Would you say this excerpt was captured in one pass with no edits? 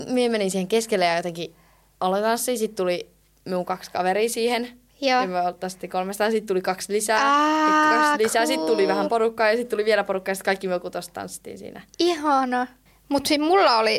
yes; 0 cuts

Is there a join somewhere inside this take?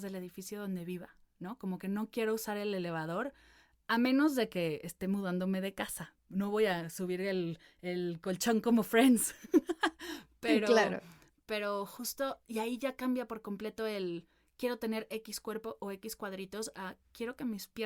no; 0 cuts

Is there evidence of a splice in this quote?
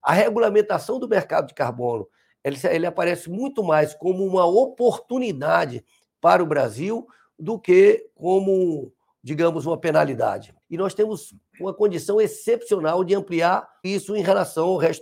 yes; 2 cuts; at 10.6 s, 13.8 s

